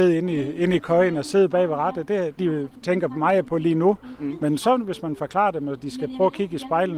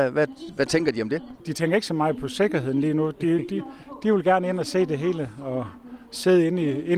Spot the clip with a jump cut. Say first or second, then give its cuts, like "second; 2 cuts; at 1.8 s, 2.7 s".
first; 1 cut; at 2.4 s